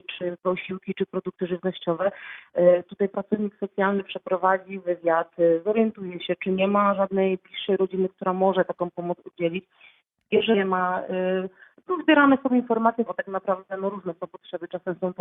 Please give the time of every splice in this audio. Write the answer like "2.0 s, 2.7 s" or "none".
13.1 s